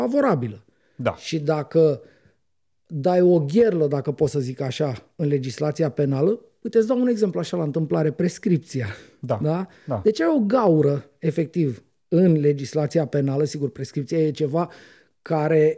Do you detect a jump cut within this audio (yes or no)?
no